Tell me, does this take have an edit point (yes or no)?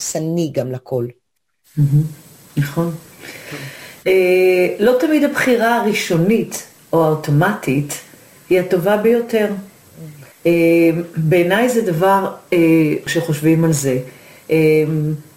yes